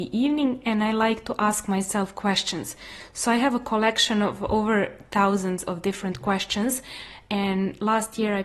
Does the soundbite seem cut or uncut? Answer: uncut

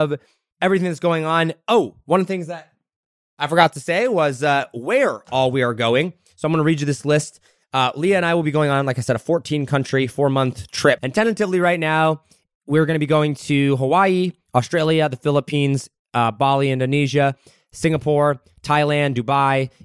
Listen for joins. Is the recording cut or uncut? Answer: cut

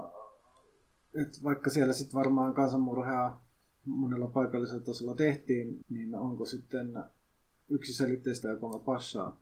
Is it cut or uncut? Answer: cut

